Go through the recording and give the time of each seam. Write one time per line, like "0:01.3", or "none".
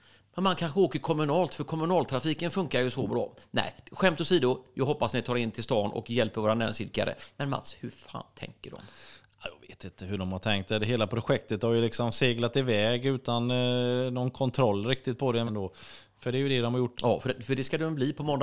0:15.5
0:16.9